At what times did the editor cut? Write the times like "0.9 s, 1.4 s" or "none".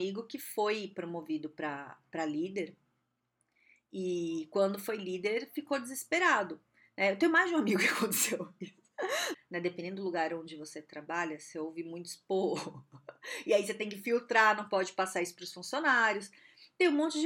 9.3 s